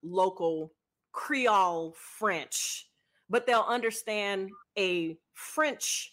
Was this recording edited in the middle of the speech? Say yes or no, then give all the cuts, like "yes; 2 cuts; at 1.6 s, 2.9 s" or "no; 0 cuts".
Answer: no; 0 cuts